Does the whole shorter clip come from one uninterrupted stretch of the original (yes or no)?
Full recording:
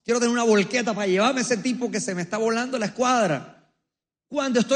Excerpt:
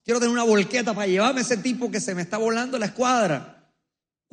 yes